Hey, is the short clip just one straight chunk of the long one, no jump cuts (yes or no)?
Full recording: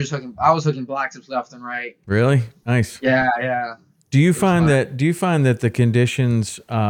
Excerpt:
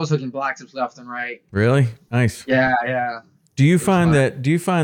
yes